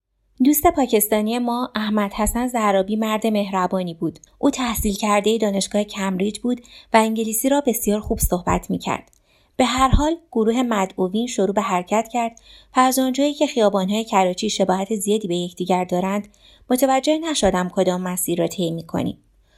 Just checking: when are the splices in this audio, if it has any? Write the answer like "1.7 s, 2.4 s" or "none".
4.3 s